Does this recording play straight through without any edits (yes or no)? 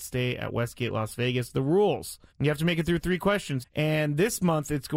no